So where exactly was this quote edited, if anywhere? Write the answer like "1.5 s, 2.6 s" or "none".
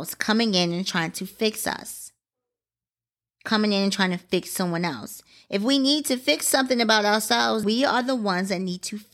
7.6 s

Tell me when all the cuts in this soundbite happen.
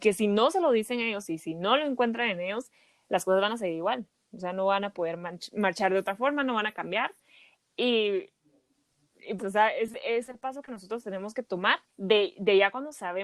9.4 s, 11.9 s

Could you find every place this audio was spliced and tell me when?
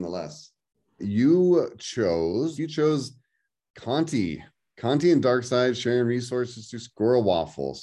1.0 s, 2.6 s

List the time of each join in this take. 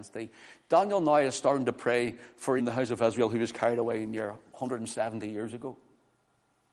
2.6 s

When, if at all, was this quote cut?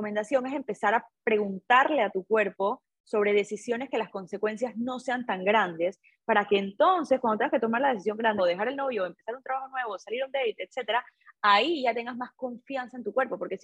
8.4 s

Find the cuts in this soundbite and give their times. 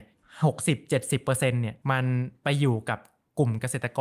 1.8 s

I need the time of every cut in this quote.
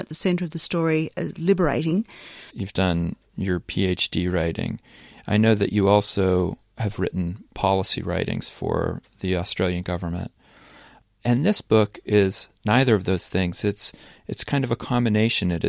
2.5 s

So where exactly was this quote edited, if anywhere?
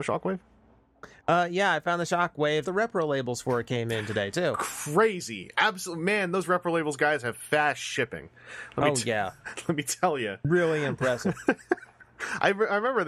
2.6 s

